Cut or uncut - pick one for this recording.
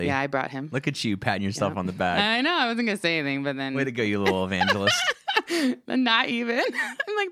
uncut